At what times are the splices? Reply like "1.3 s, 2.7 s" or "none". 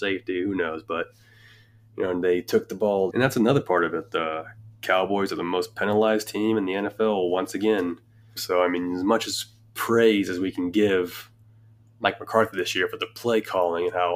3.1 s, 8.4 s